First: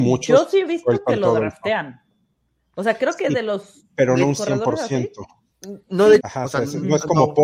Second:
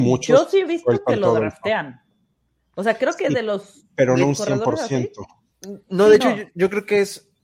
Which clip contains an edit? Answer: first; 1 cut; at 6.2 s

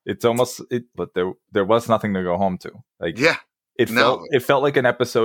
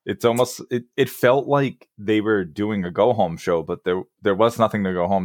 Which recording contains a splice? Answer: first; 2 cuts; at 0.9 s, 2.8 s

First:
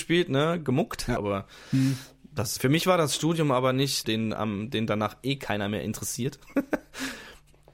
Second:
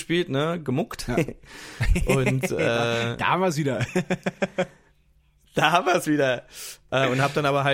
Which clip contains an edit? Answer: first; 3 cuts; at 1.2 s, 2.6 s, 4.0 s

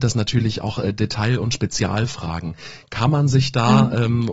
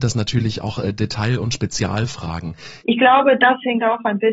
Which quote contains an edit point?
second; 1 cut; at 2.8 s

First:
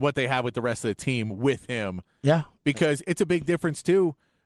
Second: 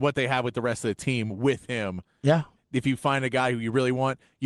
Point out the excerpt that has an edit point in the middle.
second; 1 cut; at 2.6 s

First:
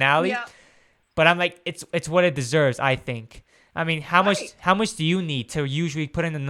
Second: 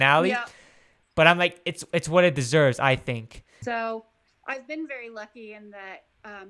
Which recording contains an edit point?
second; 1 cut; at 3.6 s

